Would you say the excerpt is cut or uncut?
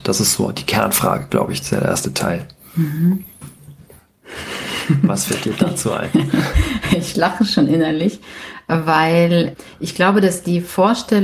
uncut